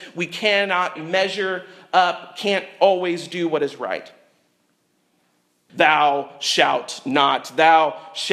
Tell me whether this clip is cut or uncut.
cut